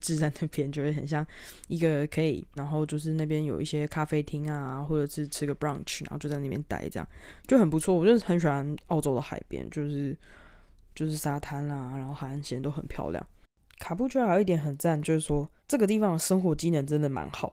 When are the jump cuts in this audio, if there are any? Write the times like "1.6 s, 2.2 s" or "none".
2.6 s, 15.6 s